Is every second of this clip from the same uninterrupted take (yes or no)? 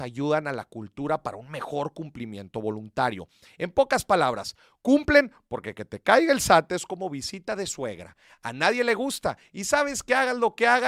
yes